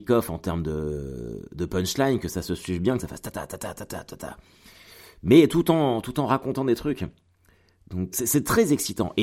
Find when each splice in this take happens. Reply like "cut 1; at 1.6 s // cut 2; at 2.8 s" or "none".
cut 1; at 8.1 s